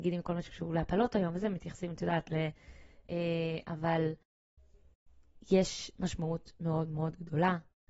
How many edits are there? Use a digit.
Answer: 1